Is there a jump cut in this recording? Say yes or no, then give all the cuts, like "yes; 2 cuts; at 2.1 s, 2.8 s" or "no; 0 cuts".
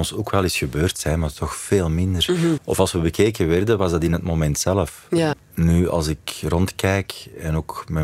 yes; 2 cuts; at 2.6 s, 5.3 s